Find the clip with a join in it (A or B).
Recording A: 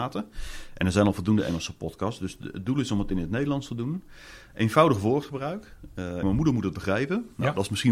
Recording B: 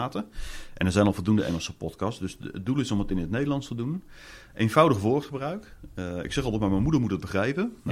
A